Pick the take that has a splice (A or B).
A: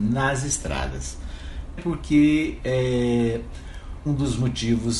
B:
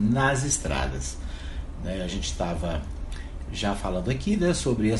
A